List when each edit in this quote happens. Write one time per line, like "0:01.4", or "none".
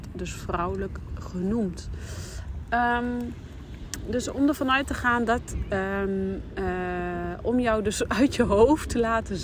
none